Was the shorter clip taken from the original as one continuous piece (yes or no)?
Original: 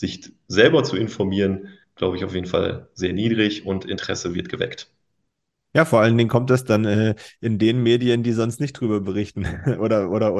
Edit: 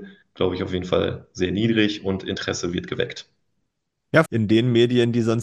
no